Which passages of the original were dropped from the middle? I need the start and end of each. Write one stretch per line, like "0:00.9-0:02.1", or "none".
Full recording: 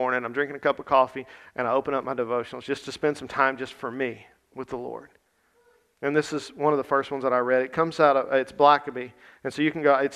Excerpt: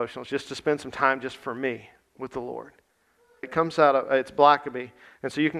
0:05.8-0:07.6